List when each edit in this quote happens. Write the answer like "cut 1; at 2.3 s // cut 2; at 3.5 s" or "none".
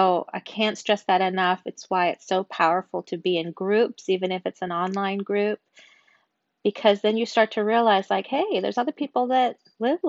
none